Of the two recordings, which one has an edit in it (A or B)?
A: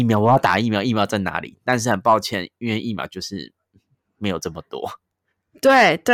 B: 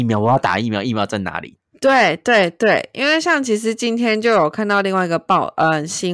B